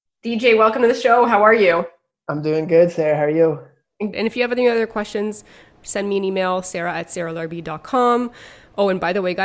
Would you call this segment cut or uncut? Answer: cut